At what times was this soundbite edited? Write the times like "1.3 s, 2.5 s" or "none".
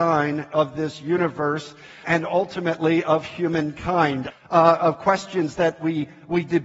2.0 s, 4.3 s